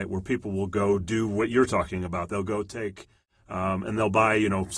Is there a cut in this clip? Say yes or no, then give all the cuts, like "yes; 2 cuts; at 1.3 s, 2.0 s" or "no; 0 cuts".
no; 0 cuts